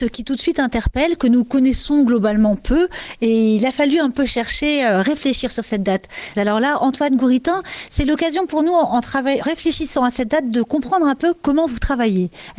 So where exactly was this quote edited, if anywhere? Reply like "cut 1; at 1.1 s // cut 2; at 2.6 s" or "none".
cut 1; at 6.3 s // cut 2; at 9.4 s